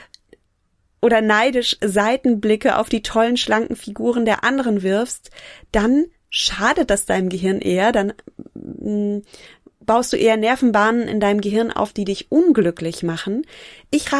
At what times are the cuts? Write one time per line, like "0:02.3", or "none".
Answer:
none

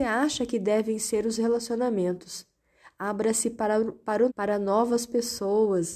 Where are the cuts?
0:04.3

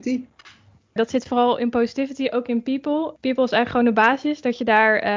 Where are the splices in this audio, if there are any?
0:01.0

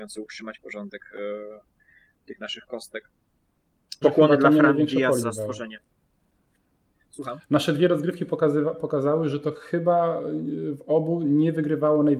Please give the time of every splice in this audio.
0:04.0
0:05.2

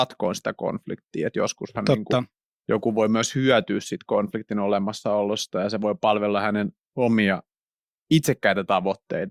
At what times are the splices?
none

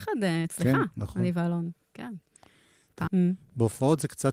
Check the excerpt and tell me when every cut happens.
0:03.1

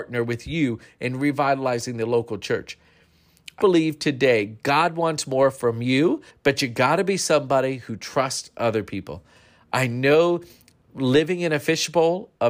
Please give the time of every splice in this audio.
0:03.6
0:06.3

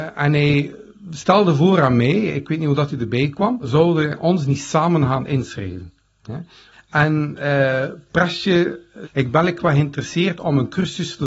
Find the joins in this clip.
0:03.6
0:06.7
0:09.0

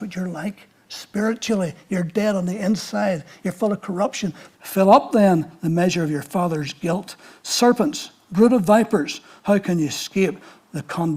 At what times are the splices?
0:04.5

